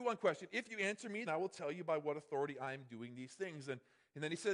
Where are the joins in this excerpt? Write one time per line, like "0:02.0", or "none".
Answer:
0:01.3